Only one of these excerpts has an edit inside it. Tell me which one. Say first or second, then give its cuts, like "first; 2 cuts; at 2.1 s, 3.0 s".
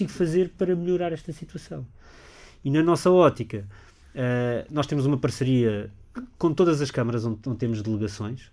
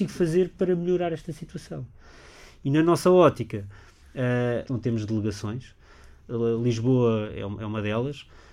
second; 1 cut; at 4.7 s